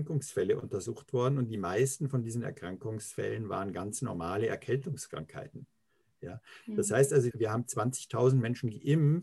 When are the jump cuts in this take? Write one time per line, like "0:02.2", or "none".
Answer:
0:07.3